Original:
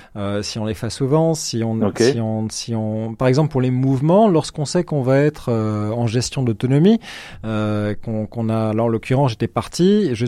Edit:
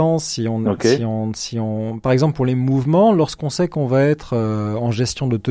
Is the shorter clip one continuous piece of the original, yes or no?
yes